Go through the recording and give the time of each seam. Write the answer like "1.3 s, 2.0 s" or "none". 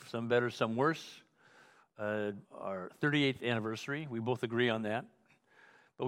2.4 s

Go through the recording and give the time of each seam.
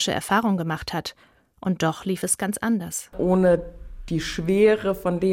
3.1 s

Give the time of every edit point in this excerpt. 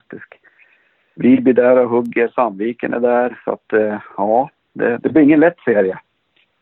5.0 s

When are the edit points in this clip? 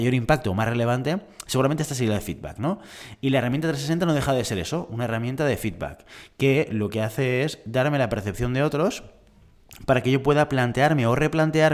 none

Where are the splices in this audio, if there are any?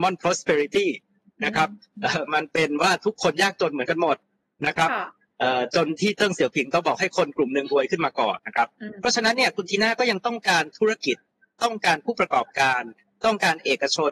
8.4 s

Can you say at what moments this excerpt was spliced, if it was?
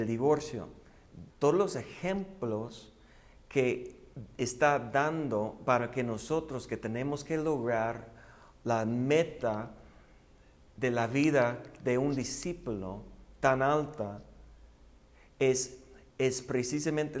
1.3 s

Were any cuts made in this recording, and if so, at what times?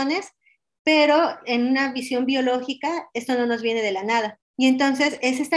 4.5 s

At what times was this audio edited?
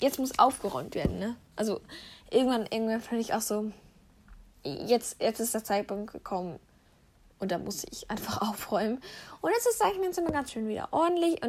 none

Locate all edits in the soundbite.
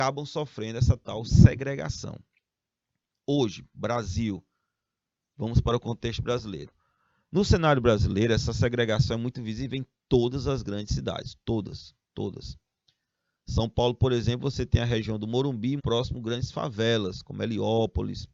15.8 s

